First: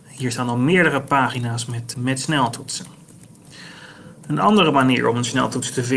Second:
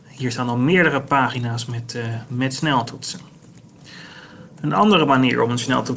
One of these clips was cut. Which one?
first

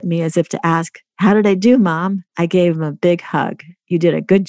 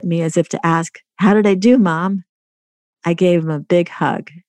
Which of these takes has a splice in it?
first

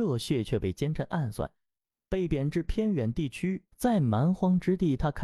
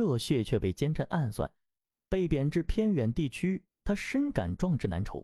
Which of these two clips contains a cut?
first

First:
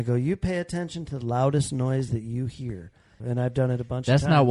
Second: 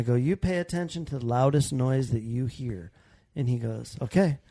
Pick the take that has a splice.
first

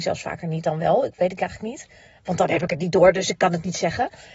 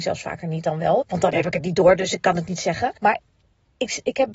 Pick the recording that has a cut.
second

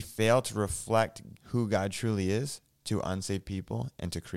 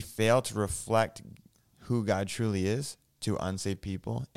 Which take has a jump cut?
first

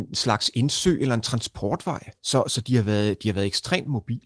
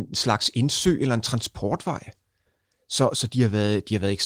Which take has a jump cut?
first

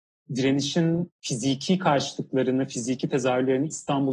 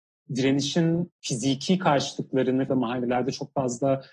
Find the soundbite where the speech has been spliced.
second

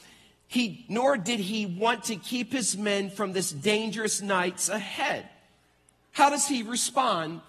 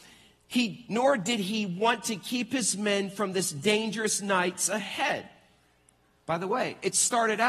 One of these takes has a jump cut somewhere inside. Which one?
first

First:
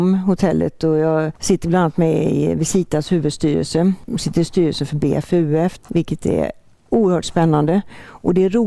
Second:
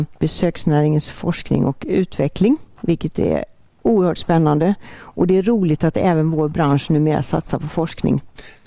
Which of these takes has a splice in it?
first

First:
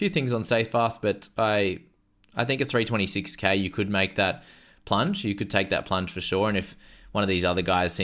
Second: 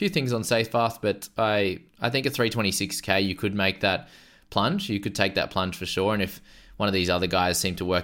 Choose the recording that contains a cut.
second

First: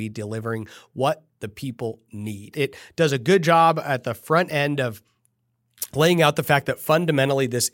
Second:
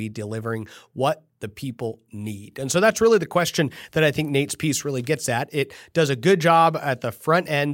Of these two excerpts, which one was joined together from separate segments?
first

